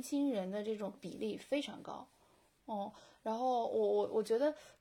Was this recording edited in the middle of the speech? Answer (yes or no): no